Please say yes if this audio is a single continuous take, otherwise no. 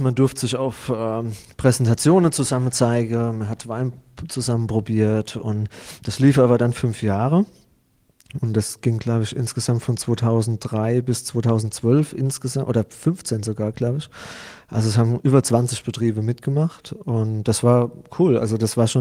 yes